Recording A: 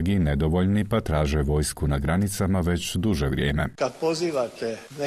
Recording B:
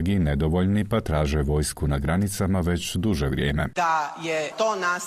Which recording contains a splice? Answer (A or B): B